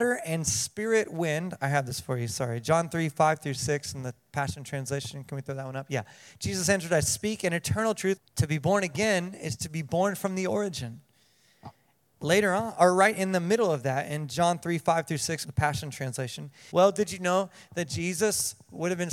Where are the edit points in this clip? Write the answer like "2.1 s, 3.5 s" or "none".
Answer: 8.2 s, 15.4 s, 16.7 s